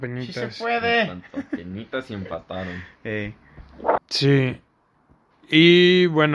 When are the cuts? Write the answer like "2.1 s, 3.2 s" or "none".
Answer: 4.0 s